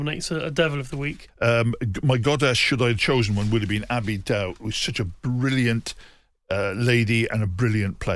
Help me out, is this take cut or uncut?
cut